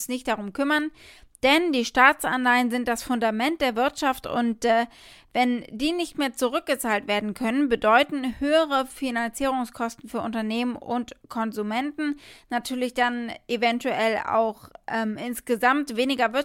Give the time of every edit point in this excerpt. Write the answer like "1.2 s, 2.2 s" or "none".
none